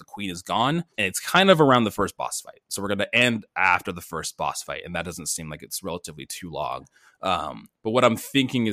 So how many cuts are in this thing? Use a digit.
1